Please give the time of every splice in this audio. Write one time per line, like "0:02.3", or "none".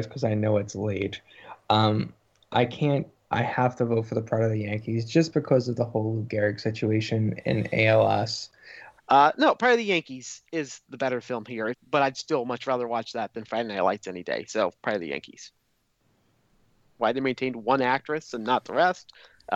0:09.0
0:11.7
0:17.0